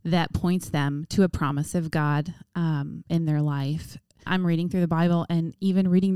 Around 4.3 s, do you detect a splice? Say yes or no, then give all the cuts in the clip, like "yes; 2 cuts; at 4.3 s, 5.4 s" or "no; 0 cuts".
yes; 1 cut; at 4.3 s